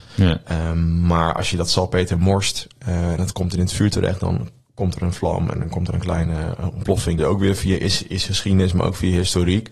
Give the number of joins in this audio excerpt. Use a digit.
1